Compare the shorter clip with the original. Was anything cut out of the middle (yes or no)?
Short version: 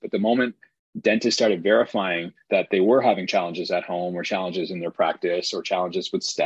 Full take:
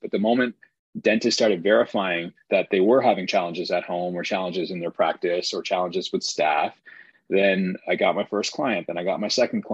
no